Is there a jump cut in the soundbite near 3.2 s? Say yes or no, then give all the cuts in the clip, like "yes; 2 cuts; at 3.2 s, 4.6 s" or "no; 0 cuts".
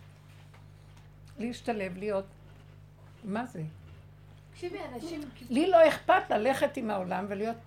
no; 0 cuts